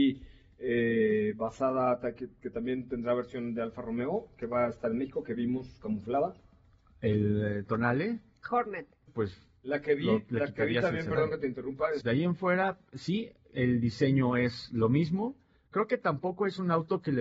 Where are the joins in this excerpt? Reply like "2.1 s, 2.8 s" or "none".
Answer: 9.1 s, 12.0 s